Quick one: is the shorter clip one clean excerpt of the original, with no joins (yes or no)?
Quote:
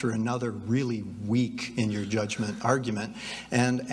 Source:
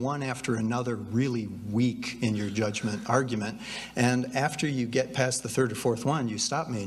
yes